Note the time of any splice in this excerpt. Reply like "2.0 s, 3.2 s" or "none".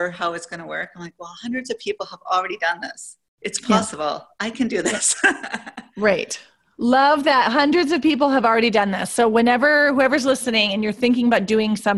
none